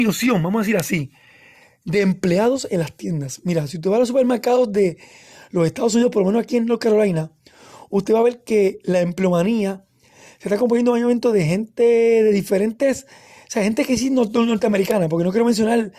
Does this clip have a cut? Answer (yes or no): no